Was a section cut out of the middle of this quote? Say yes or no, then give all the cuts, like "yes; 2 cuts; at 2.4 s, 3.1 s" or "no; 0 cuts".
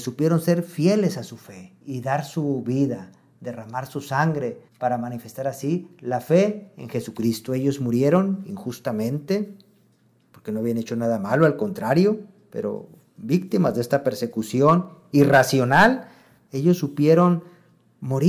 yes; 2 cuts; at 1.8 s, 4.7 s